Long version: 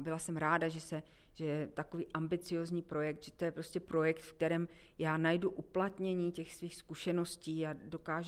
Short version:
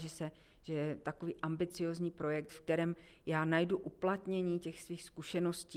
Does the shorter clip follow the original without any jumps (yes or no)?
no